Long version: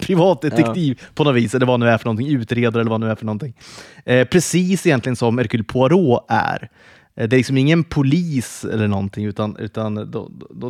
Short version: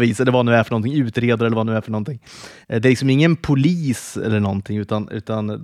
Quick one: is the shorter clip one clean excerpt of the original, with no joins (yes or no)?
no